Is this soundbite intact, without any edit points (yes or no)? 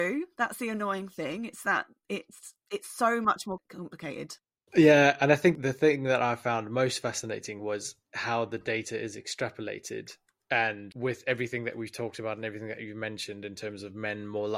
yes